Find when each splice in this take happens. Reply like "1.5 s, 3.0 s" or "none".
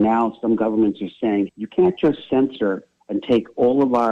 1.5 s